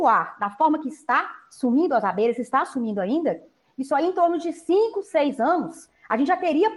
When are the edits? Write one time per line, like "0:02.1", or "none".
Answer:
none